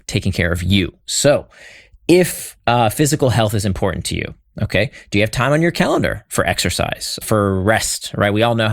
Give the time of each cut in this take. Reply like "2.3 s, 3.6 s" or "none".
7.2 s